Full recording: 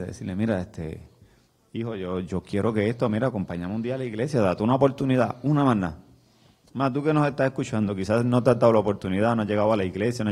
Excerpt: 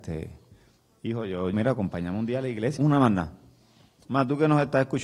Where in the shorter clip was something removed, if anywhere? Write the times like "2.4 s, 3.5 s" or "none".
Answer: 1.5 s, 2.8 s